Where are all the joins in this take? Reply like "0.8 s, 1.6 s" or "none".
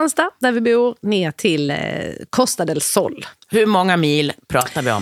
none

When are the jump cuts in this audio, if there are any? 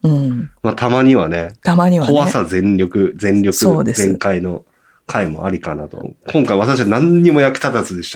6.0 s

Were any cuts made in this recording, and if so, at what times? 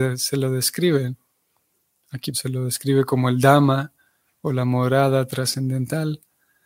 2.3 s

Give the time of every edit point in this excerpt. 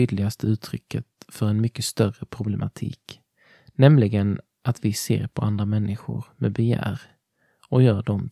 none

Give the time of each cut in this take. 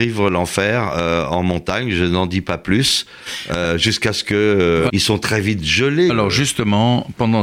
4.9 s, 6.1 s

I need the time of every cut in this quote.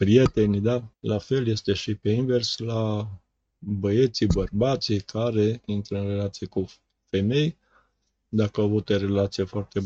0.9 s

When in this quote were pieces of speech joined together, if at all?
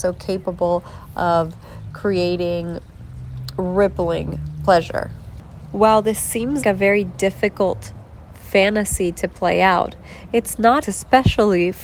6.6 s, 10.8 s

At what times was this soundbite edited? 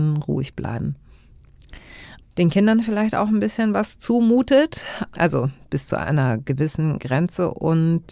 2.2 s, 5.1 s

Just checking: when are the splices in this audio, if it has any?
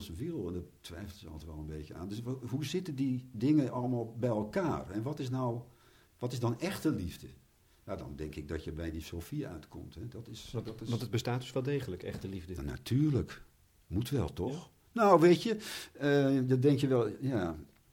none

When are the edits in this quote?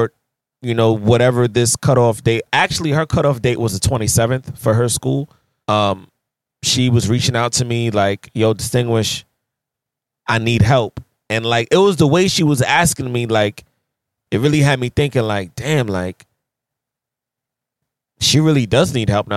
5.6 s

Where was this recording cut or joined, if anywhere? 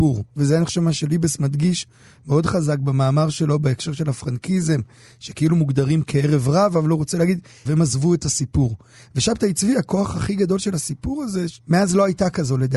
7.7 s, 11.6 s

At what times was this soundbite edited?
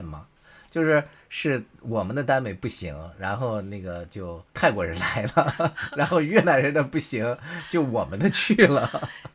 4.5 s

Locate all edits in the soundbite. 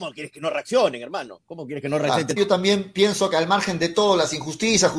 2.4 s

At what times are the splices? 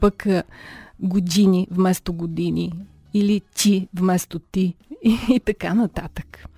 none

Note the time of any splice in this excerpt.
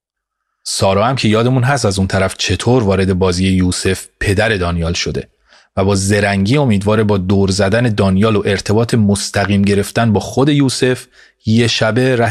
none

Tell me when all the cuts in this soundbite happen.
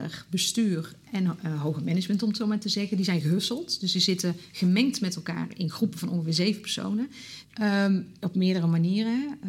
7.4 s

